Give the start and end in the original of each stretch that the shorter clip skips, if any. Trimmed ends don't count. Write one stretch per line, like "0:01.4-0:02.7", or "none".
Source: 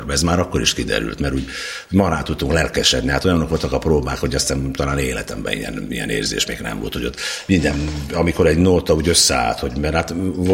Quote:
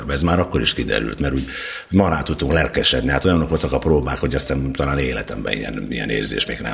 none

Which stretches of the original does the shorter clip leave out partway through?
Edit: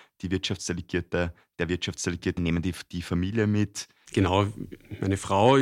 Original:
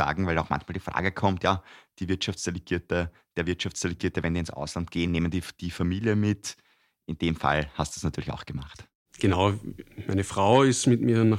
0:04.1-0:05.1
0:06.7-0:09.1

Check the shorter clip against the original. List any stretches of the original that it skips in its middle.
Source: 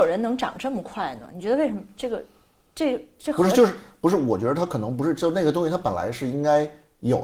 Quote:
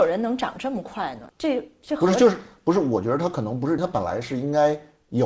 0:01.3-0:02.7
0:05.1-0:05.7

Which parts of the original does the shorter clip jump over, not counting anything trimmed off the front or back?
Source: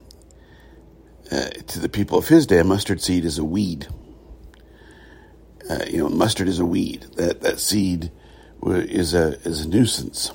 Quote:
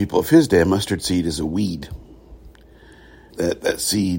0:05.3-0:07.1

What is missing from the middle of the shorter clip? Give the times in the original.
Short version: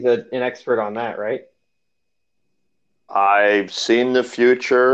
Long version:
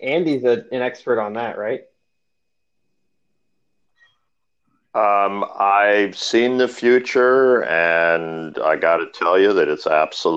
0:03.5-0:05.5

